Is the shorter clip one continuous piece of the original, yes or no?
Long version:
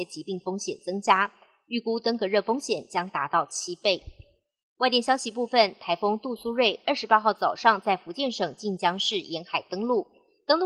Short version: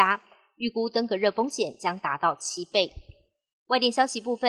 yes